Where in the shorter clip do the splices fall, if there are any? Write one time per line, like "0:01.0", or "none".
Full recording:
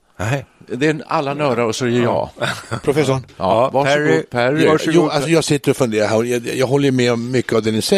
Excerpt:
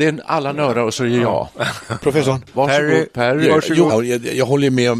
0:02.5
0:03.9